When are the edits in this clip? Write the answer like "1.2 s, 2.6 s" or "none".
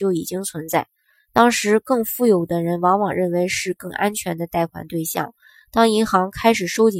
none